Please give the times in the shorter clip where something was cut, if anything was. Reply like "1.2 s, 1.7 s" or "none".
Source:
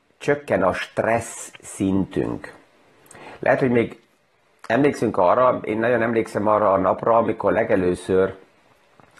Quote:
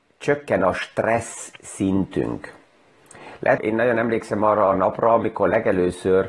3.6 s